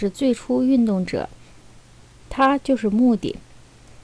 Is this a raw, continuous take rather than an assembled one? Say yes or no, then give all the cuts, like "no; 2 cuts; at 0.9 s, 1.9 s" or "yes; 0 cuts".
yes; 0 cuts